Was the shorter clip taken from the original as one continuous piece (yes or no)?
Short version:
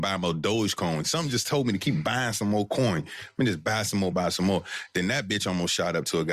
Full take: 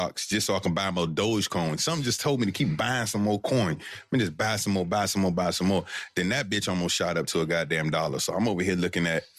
no